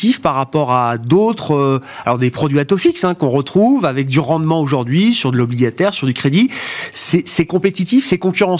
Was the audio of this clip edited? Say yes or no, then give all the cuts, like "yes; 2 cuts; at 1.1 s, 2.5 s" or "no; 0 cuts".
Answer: no; 0 cuts